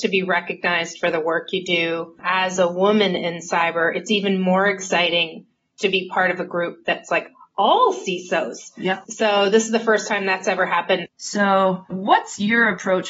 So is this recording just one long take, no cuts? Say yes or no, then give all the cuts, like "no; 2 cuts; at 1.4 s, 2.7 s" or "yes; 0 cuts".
no; 2 cuts; at 9.1 s, 11.1 s